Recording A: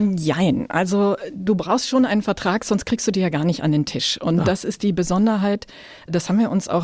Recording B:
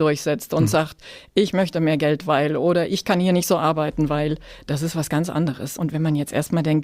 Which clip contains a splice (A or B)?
B